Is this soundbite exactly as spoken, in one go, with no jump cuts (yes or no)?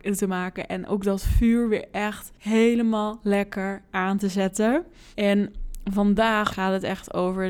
no